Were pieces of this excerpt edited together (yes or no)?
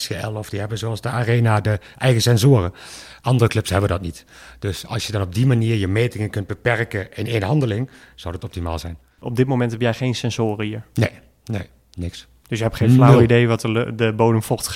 no